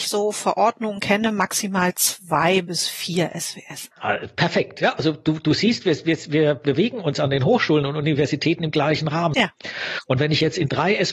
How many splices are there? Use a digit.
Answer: 1